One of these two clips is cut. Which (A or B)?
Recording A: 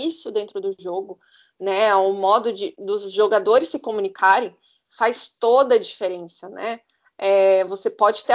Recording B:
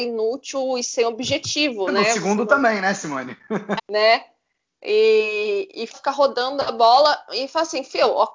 B